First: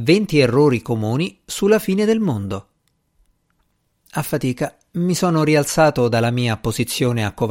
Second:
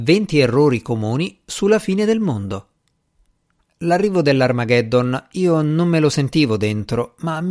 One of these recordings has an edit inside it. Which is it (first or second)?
second